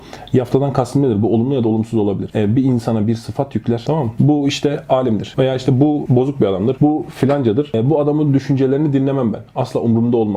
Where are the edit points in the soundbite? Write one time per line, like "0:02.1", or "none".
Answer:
none